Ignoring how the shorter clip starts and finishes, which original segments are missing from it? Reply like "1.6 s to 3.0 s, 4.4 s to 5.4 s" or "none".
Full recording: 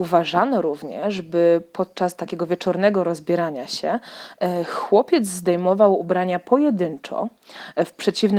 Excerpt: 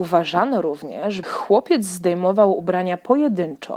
1.2 s to 4.6 s